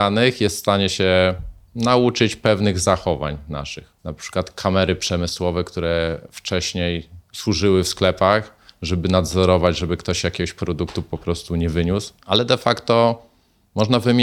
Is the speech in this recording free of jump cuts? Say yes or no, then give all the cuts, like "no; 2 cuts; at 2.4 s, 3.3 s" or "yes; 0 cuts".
no; 2 cuts; at 4.0 s, 12.2 s